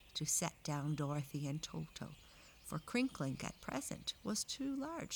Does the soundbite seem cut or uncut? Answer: uncut